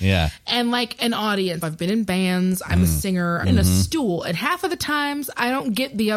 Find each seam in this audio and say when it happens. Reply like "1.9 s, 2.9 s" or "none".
1.6 s, 3.4 s